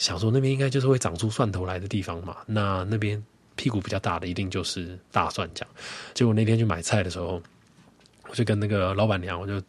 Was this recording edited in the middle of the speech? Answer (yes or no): no